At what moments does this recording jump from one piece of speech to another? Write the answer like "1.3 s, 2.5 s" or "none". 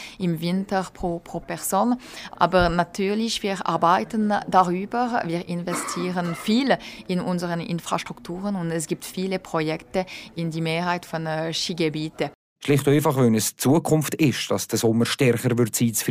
2.3 s, 12.6 s